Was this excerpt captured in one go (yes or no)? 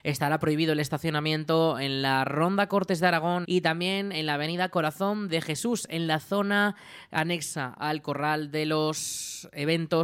no